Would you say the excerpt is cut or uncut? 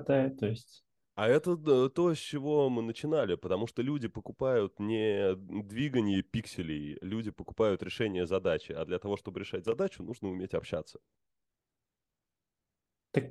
uncut